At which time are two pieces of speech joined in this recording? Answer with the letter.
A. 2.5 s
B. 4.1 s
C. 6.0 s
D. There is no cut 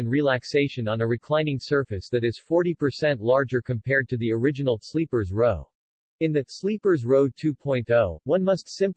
C